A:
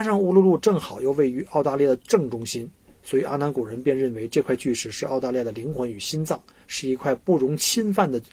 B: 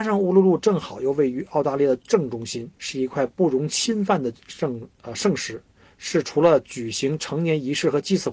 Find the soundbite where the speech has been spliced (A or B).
B